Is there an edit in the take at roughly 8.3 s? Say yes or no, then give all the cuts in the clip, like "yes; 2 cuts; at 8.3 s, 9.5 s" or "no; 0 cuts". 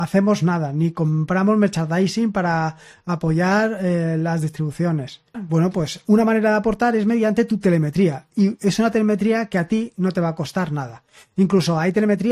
no; 1 cut; at 5.3 s